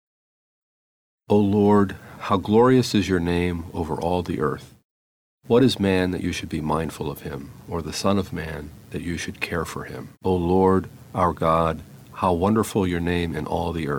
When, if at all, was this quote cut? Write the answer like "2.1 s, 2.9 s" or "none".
2.2 s, 10.1 s